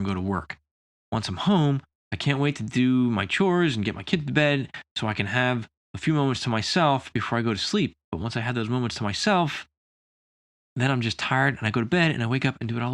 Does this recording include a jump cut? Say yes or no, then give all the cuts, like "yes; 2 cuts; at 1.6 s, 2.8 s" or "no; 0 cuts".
yes; 1 cut; at 1.0 s